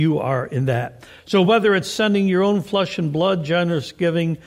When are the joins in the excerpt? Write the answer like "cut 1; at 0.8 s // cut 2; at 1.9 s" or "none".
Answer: none